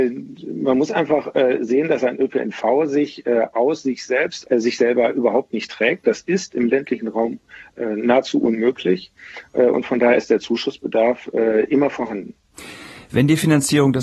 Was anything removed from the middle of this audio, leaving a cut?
yes; 1 cut; at 4.4 s

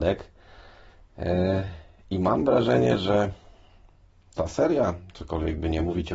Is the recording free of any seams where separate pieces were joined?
yes; 0 cuts

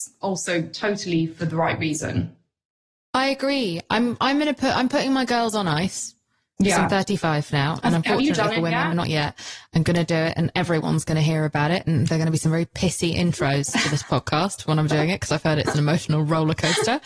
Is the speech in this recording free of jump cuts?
no; 1 cut; at 8.9 s

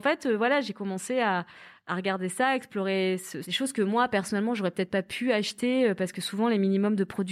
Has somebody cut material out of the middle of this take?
yes; 1 cut; at 3.4 s

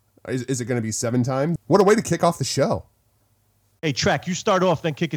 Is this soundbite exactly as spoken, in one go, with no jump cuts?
no; 1 cut; at 1.6 s

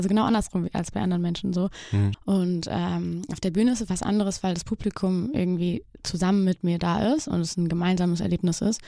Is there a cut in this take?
yes; 1 cut; at 2.1 s

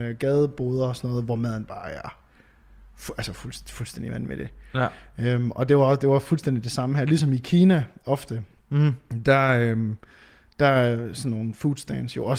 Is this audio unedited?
yes; 0 cuts

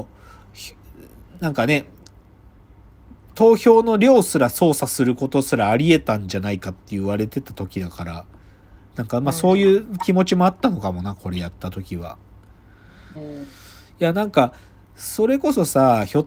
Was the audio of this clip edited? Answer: yes; 2 cuts; at 3.3 s, 13.2 s

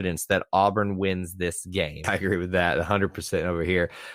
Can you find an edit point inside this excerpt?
yes; 1 cut; at 2.0 s

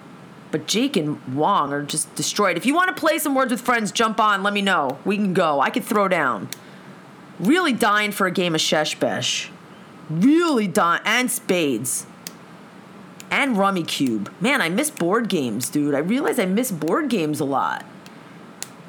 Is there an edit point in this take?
yes; 1 cut; at 1.7 s

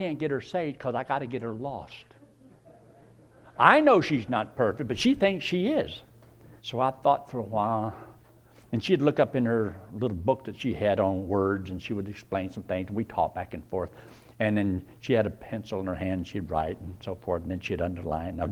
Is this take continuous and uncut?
no; 1 cut; at 6.6 s

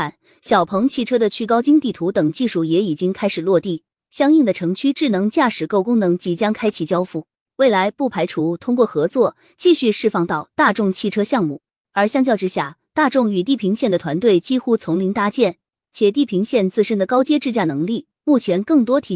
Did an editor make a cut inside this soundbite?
no; 0 cuts

